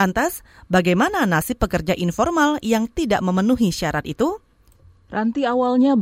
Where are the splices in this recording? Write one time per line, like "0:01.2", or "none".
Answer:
0:04.7